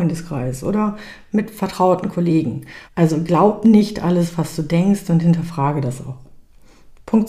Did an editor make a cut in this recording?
yes; 1 cut; at 2.9 s

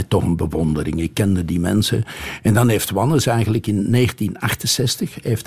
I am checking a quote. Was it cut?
no; 0 cuts

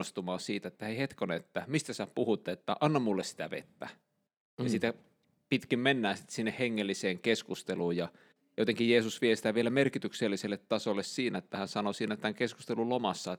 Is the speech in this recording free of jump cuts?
yes; 0 cuts

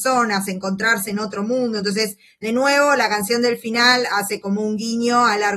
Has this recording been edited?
no; 0 cuts

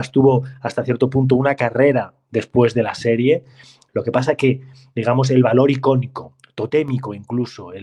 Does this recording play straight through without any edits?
yes; 0 cuts

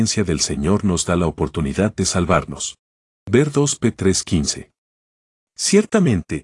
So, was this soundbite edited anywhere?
no; 0 cuts

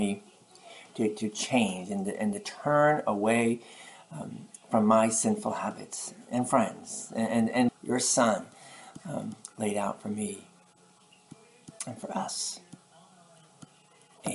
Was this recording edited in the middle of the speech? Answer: yes; 1 cut; at 7.7 s

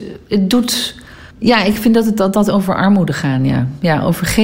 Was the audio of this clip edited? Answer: yes; 1 cut; at 1.3 s

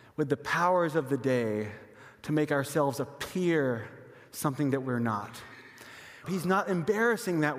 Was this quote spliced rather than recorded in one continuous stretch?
yes; 1 cut; at 6.2 s

